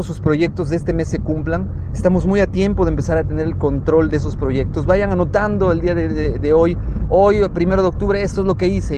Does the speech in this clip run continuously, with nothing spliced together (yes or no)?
yes